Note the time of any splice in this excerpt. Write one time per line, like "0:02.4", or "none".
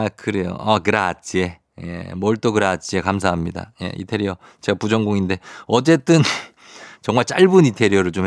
0:06.9

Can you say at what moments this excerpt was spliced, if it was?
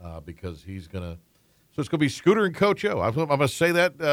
none

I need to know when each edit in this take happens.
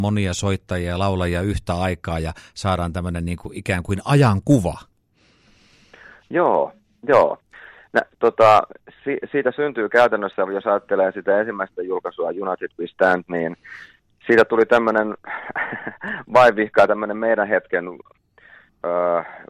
none

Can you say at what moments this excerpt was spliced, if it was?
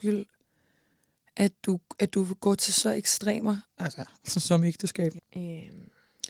0:05.2

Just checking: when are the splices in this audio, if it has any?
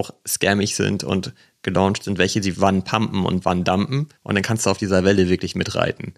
0:02.5
0:04.2

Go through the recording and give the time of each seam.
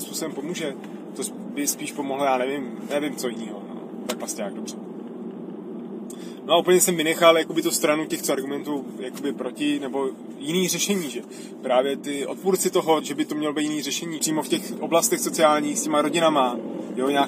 0:13.0
0:14.2

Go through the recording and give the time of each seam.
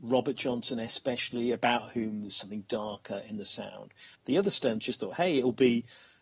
0:04.2

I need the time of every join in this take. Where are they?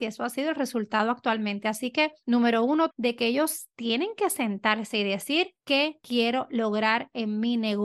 0:02.9

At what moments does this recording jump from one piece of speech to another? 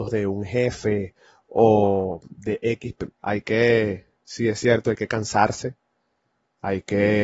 0:03.1

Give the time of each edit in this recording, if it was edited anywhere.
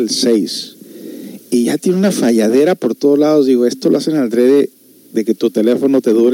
none

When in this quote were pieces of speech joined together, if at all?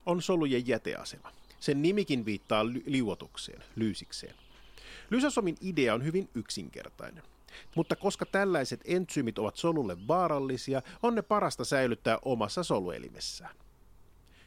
0:07.7

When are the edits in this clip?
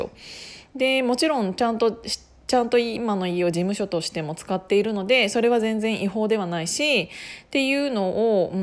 none

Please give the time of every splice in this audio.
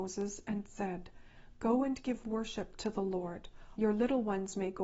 0:03.8

